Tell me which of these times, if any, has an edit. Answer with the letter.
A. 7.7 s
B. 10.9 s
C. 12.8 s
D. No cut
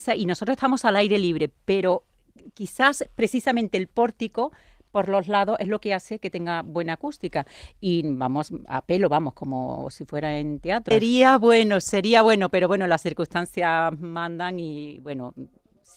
B